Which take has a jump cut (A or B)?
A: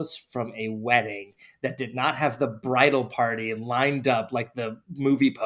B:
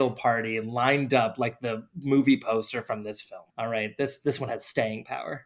B